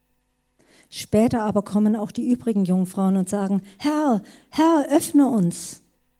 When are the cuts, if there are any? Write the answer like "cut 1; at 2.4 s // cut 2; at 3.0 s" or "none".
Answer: none